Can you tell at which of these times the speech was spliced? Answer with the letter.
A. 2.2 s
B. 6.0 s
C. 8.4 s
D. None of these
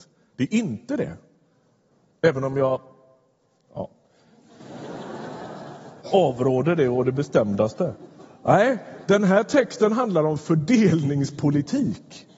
B